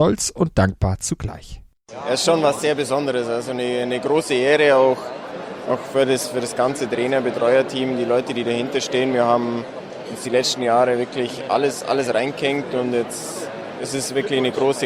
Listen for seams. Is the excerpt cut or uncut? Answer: uncut